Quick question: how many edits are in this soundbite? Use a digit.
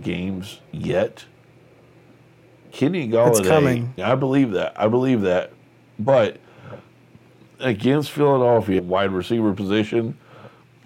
2